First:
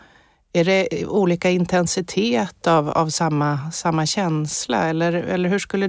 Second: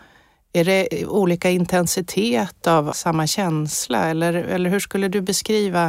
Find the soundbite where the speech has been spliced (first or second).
second